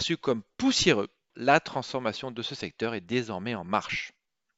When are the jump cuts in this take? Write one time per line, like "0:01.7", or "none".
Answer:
0:01.3